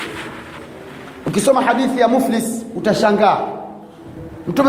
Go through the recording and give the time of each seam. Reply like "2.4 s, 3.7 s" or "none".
none